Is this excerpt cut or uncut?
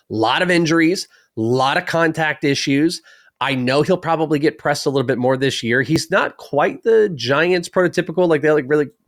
uncut